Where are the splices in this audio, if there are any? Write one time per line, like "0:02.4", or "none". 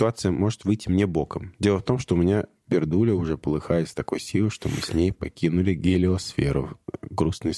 none